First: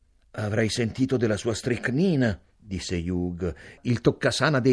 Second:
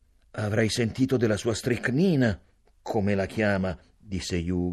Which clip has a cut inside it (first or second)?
first